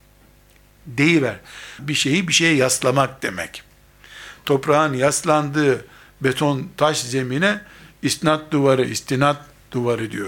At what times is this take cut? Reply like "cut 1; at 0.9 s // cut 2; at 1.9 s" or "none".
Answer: cut 1; at 1.8 s